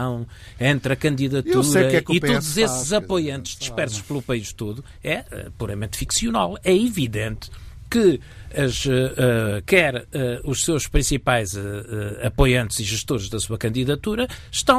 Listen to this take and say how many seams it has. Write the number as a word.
one